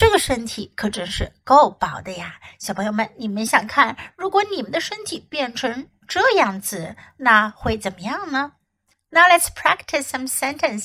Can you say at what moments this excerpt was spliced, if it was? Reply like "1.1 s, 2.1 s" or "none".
3.5 s